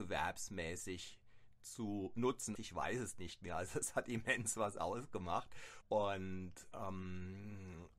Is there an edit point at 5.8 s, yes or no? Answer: yes